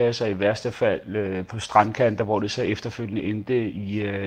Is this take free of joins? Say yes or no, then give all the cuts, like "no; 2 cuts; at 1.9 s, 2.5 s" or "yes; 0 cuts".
yes; 0 cuts